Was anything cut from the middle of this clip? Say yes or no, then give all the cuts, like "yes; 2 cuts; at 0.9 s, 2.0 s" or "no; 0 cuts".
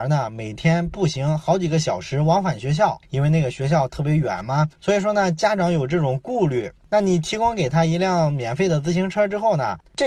no; 0 cuts